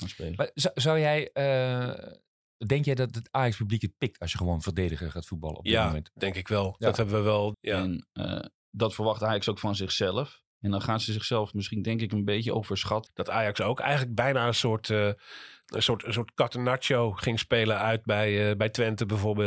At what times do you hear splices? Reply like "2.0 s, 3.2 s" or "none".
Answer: 7.5 s, 13.1 s

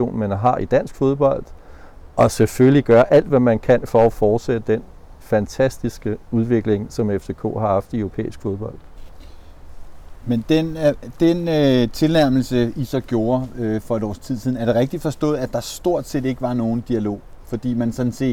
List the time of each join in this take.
none

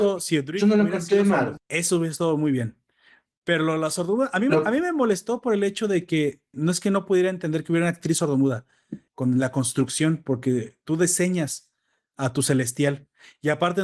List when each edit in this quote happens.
1.6 s, 6.5 s, 9.1 s

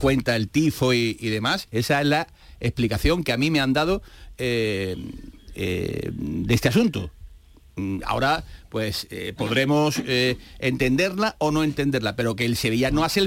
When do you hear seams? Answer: 1.7 s

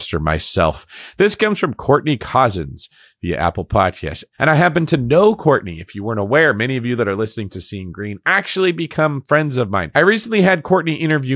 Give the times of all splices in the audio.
none

